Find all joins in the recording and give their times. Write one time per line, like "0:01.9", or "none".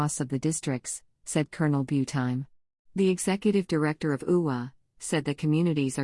0:05.0

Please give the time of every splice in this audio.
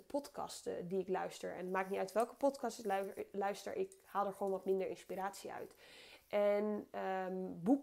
none

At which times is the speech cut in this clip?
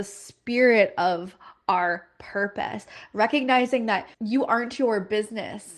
0:04.1

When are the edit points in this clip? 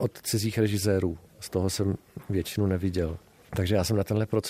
0:01.3
0:03.4

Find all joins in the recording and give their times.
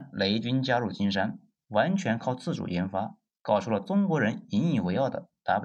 0:01.6

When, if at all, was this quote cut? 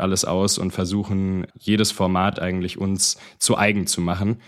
none

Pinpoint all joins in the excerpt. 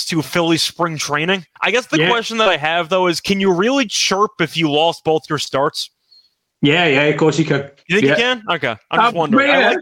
0:01.6

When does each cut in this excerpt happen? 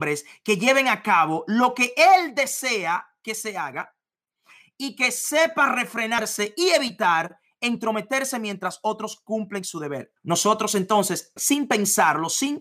0:10.2
0:11.4

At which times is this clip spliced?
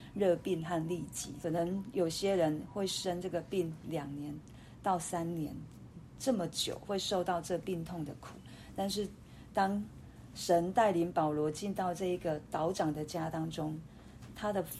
0:01.4

